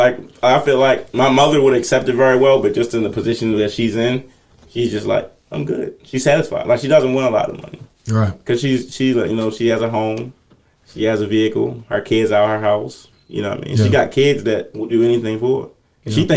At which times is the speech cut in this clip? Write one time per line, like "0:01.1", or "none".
none

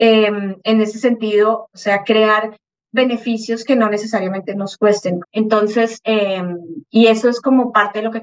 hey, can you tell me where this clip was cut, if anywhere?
0:01.7
0:05.2

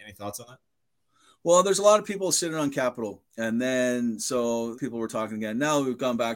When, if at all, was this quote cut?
0:03.3
0:04.7

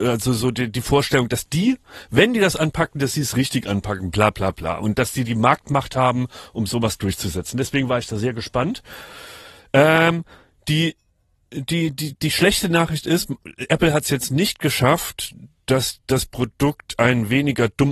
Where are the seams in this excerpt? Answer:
none

